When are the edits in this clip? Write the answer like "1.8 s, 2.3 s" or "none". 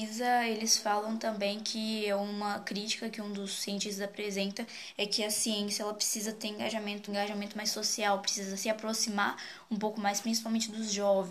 7.1 s